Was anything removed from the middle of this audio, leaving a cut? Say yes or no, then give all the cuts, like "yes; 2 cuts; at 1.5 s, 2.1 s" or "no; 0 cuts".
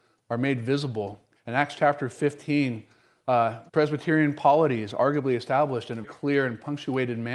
yes; 3 cuts; at 1.4 s, 3.7 s, 6.0 s